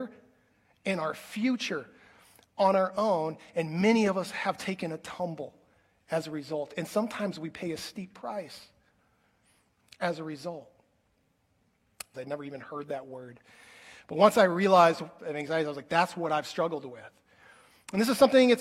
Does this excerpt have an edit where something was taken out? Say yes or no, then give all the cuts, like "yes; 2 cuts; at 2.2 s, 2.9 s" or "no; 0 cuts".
yes; 2 cuts; at 12.1 s, 15.2 s